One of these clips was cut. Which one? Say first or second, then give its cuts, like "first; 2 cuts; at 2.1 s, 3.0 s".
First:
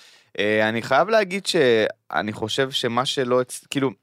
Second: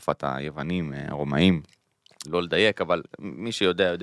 second; 1 cut; at 2.2 s